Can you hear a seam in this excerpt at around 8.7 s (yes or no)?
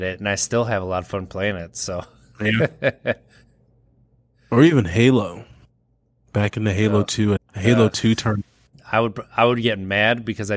yes